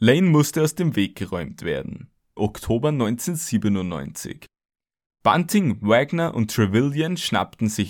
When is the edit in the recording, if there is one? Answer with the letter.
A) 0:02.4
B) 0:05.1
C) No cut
A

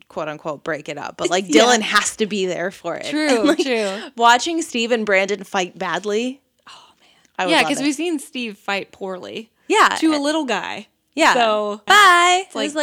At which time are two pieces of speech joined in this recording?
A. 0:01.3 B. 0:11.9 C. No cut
B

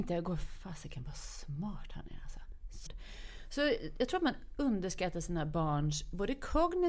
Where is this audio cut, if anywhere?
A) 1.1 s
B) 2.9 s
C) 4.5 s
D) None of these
B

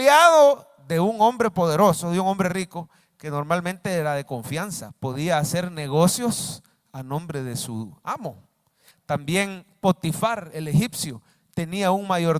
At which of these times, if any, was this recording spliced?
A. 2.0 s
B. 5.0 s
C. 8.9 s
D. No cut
C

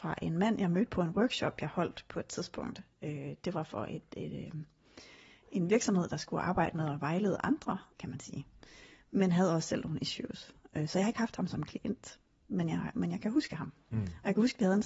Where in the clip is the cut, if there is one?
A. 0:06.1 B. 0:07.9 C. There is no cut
B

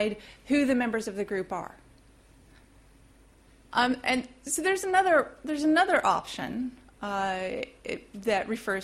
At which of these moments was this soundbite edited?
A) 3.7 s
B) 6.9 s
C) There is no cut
A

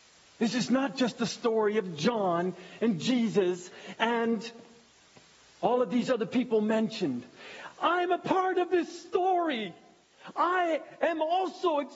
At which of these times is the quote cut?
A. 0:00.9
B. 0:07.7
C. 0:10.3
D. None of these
D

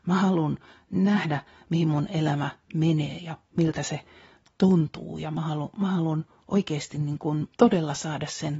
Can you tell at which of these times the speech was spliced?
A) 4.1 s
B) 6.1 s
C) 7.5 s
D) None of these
C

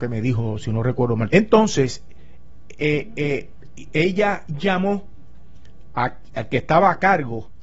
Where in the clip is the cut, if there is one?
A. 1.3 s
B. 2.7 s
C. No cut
A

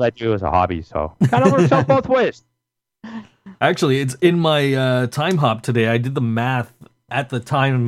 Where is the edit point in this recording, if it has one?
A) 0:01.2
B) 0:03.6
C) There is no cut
B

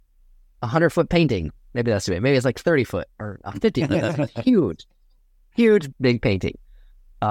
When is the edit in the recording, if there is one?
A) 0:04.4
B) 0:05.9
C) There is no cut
B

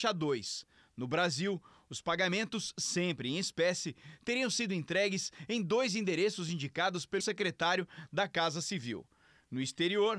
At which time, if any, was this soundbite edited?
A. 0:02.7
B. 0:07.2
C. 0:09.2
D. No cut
B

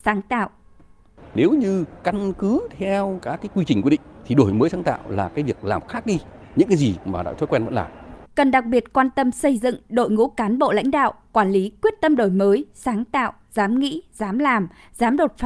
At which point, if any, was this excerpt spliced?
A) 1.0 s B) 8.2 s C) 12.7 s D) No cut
B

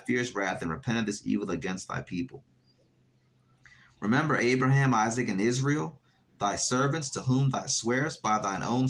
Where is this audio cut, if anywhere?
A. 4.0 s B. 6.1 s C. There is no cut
C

